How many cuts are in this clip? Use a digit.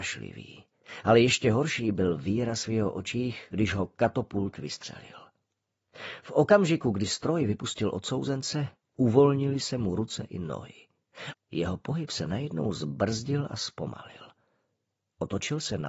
1